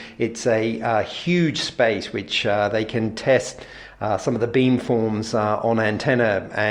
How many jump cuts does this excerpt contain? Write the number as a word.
zero